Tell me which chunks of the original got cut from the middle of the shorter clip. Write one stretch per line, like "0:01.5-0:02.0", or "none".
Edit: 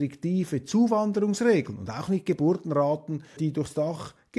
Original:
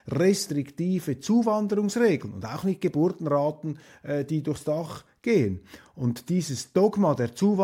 0:03.9-0:04.3